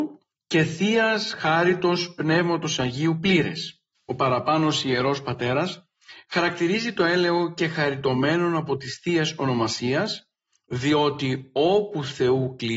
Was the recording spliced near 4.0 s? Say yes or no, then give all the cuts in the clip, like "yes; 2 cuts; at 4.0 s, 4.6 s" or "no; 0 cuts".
yes; 1 cut; at 4.0 s